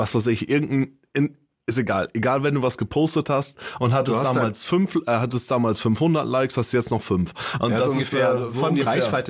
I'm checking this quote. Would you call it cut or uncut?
uncut